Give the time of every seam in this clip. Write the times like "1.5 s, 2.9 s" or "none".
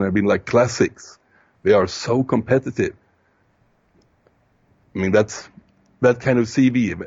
none

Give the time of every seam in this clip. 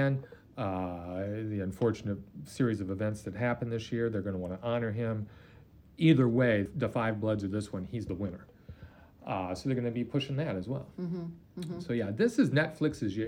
6.7 s

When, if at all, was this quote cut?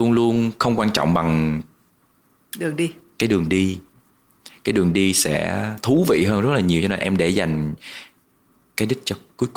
none

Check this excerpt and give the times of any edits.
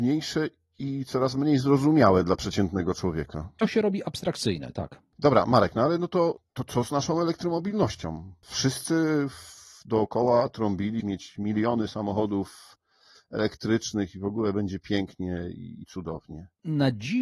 11.0 s

